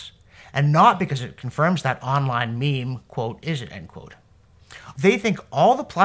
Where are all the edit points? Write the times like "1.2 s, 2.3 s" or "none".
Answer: 3.4 s, 4.9 s